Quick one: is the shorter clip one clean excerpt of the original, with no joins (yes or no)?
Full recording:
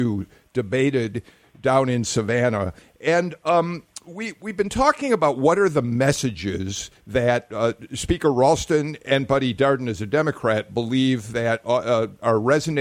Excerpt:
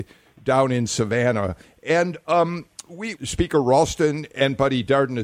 no